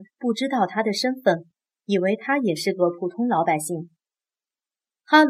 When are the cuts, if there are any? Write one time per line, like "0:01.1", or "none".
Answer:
none